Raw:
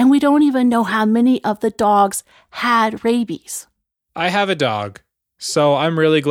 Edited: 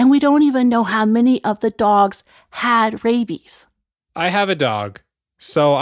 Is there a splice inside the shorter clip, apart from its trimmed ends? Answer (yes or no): no